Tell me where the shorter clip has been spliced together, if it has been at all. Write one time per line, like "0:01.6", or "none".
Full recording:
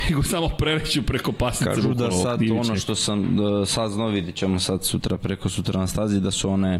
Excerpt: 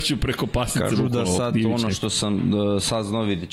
none